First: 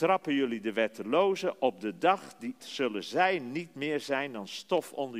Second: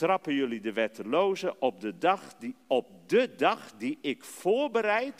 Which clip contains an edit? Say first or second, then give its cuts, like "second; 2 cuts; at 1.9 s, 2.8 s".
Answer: first; 1 cut; at 2.6 s